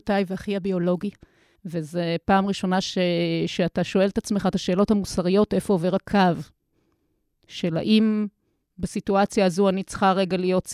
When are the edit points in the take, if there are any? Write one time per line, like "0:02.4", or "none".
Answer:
0:01.6